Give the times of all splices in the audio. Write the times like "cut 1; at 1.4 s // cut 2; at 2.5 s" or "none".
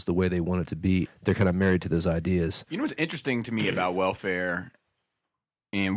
cut 1; at 1.1 s